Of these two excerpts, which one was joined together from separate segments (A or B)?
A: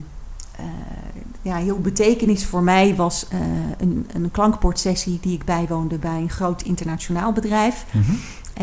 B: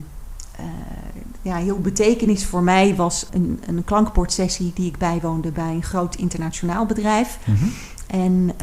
B